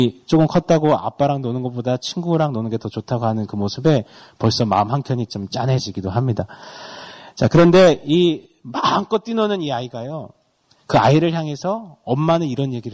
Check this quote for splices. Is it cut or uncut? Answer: uncut